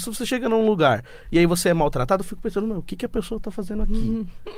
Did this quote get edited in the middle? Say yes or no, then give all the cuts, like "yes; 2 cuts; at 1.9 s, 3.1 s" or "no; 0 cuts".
no; 0 cuts